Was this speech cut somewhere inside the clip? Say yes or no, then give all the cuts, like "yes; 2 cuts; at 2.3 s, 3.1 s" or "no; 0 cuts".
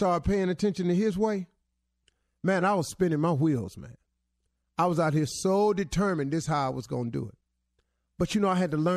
no; 0 cuts